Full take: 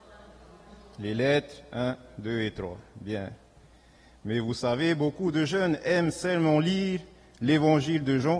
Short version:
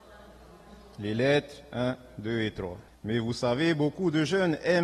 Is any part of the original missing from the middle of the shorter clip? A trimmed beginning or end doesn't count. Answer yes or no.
yes